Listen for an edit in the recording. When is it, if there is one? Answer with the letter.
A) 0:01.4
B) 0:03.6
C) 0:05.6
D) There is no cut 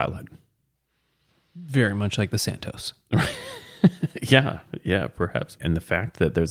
C